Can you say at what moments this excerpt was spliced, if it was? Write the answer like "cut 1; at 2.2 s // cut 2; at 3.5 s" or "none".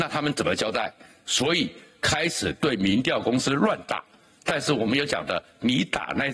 none